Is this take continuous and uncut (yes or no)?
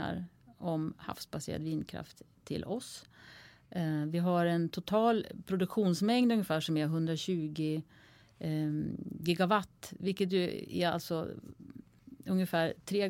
yes